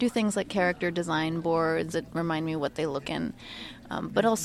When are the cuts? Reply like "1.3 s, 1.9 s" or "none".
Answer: 1.9 s, 3.0 s

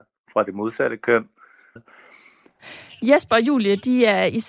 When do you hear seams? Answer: 1.8 s

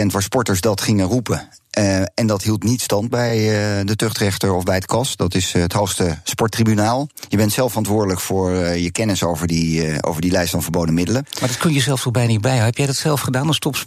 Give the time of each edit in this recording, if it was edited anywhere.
none

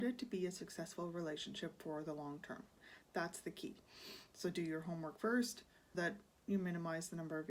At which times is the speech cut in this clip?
5.9 s

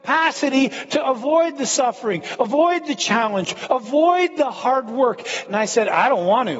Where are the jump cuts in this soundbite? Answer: 5.4 s

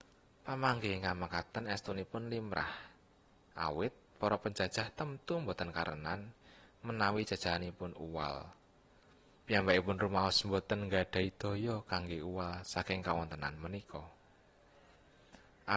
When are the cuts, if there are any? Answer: 9.4 s

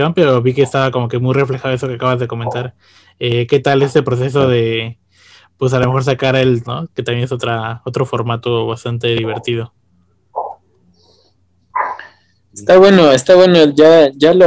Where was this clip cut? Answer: 6.6 s

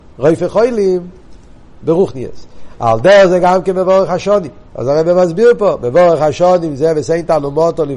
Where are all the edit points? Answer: 4.7 s

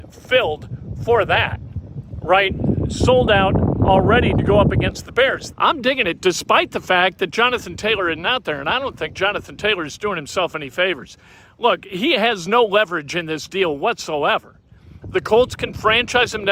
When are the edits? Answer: 5.5 s, 15.0 s

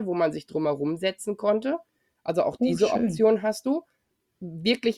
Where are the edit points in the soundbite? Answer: none

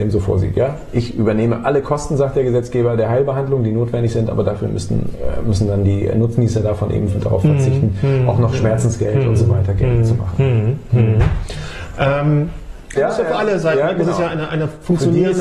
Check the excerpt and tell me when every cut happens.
13.0 s

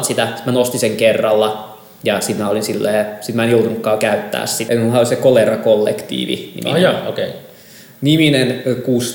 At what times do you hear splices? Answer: 4.7 s

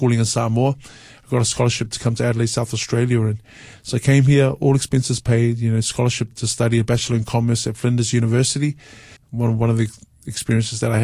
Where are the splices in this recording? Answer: 6.3 s, 9.2 s

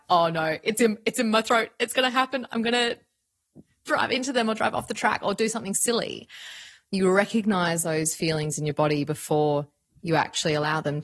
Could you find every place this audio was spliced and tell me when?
none

